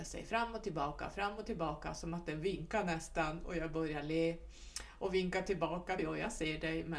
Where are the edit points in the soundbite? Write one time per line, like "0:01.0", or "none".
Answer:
0:06.0